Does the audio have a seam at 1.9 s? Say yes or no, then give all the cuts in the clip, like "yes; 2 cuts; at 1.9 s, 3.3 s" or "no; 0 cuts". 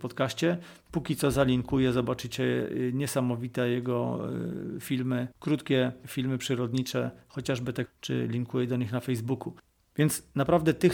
no; 2 cuts; at 5.3 s, 7.8 s